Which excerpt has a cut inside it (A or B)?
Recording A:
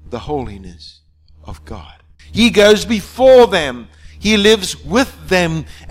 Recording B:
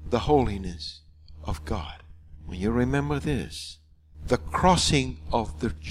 A